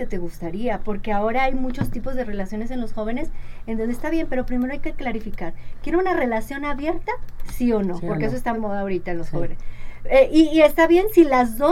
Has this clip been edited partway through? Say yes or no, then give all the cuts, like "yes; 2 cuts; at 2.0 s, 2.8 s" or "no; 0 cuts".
yes; 1 cut; at 8.5 s